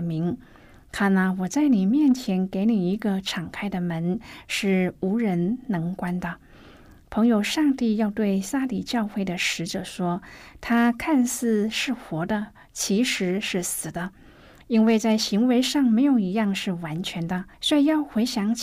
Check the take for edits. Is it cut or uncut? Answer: cut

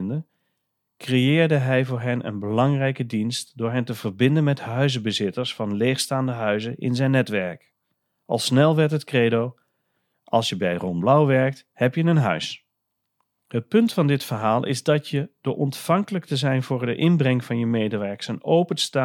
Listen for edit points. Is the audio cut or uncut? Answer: uncut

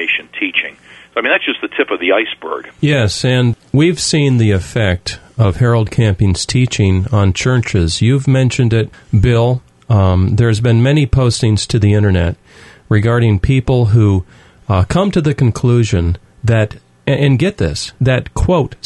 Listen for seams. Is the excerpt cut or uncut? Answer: cut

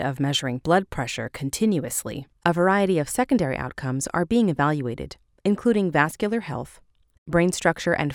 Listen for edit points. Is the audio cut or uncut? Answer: cut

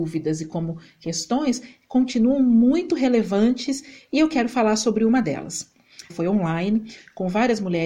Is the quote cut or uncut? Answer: cut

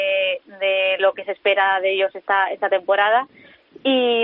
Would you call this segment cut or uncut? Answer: uncut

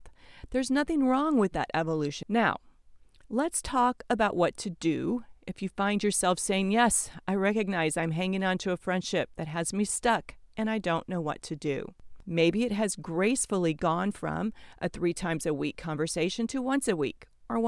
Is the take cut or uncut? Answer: cut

